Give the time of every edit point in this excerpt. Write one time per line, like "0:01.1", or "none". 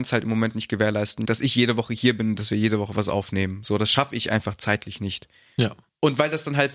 none